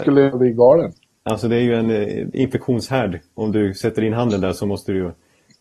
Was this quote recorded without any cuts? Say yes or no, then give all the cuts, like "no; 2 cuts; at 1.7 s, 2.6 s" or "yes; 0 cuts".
yes; 0 cuts